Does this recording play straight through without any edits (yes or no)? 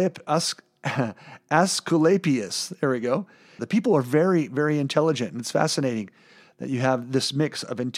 no